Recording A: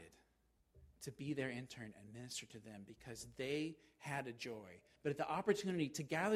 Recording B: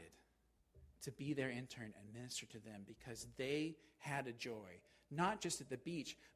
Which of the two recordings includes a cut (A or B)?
A